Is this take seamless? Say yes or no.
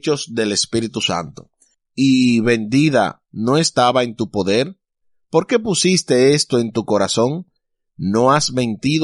no